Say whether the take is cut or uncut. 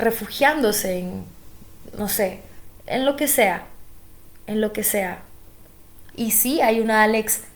cut